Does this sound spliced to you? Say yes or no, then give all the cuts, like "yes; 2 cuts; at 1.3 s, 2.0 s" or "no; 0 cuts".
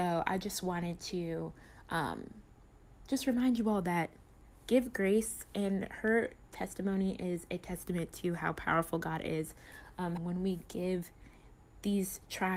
yes; 1 cut; at 10.2 s